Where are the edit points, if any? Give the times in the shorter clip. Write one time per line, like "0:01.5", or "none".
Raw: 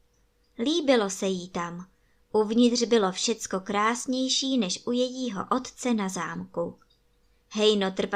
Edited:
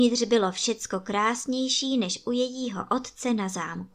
none